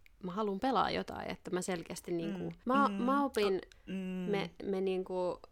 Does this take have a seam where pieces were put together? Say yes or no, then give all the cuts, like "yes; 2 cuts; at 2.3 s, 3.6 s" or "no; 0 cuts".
yes; 2 cuts; at 2.6 s, 3.7 s